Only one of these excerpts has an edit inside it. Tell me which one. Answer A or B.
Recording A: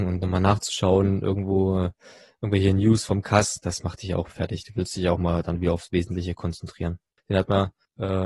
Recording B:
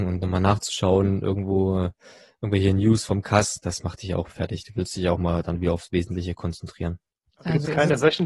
A